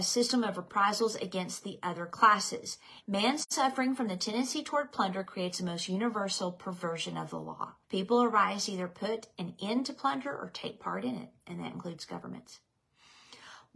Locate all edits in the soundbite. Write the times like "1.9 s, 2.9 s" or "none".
3.0 s, 7.8 s